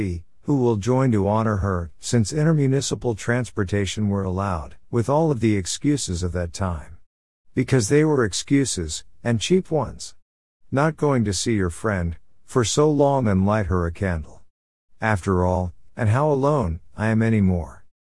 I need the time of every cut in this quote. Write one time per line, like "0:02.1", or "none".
0:04.8
0:15.9